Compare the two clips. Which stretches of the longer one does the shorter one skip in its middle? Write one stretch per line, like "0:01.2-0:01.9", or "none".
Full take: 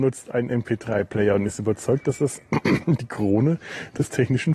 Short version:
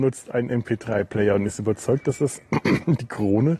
none